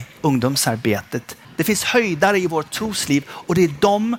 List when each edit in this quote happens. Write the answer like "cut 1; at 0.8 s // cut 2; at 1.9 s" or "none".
cut 1; at 1.4 s